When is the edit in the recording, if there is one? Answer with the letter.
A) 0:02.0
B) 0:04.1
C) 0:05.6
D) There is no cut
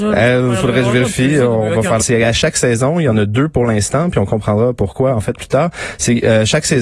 A